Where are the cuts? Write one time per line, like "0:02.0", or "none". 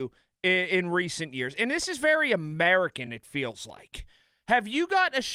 none